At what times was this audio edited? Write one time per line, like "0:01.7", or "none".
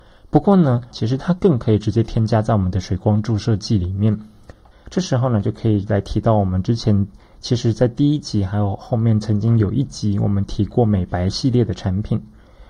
0:00.9
0:04.7